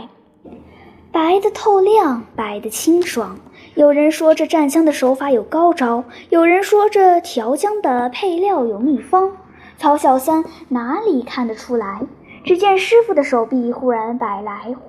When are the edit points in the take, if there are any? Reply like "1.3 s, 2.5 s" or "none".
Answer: none